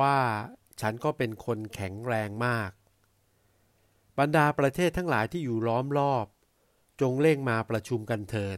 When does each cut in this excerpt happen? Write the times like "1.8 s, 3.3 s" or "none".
none